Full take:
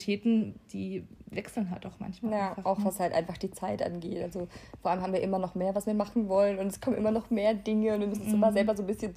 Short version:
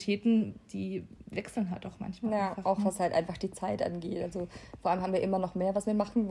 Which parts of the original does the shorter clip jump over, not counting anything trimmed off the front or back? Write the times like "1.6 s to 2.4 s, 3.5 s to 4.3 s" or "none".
none